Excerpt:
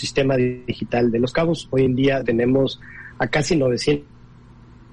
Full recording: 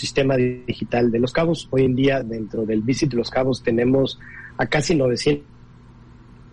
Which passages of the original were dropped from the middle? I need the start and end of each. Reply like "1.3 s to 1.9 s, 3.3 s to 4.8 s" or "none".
2.2 s to 3.6 s